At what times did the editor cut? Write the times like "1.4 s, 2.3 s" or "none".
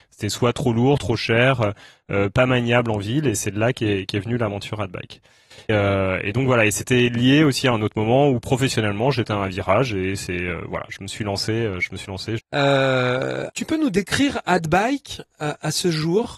5.7 s, 12.4 s, 13.5 s